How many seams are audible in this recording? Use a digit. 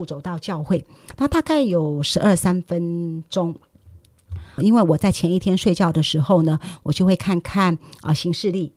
1